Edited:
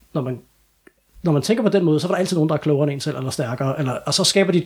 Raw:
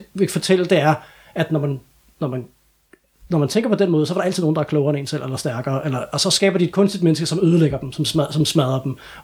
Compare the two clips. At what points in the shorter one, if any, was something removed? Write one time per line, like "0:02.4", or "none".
none